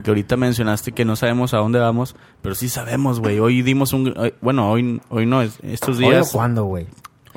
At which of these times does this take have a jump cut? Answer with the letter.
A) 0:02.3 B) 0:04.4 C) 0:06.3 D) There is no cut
D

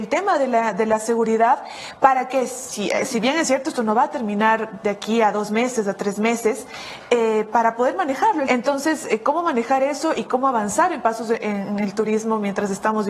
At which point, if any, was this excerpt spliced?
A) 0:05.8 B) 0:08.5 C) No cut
B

